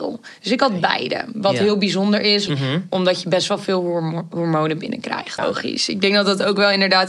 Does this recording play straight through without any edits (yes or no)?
no